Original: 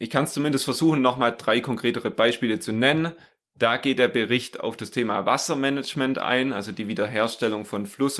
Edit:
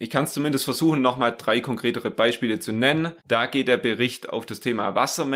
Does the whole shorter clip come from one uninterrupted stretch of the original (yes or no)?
no